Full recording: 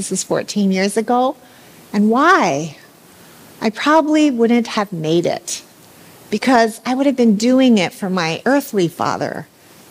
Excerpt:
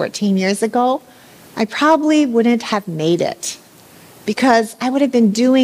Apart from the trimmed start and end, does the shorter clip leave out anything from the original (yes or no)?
yes